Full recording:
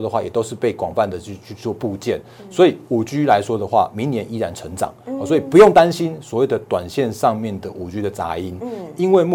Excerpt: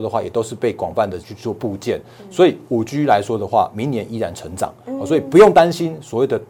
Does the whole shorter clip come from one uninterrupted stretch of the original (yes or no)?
no